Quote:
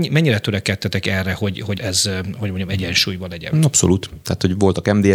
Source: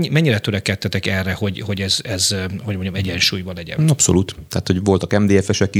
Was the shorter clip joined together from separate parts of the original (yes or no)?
yes